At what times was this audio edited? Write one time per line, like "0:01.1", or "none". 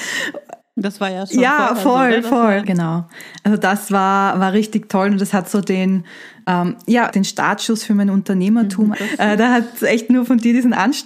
0:02.6
0:07.1
0:08.9